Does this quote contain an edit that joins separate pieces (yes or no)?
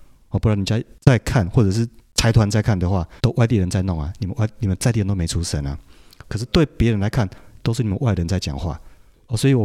yes